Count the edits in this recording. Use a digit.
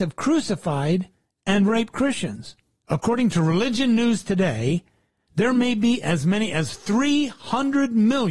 1